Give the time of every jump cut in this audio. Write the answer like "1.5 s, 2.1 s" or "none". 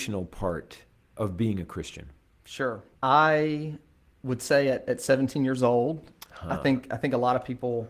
2.9 s